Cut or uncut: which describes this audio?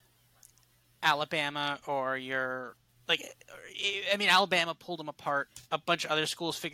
uncut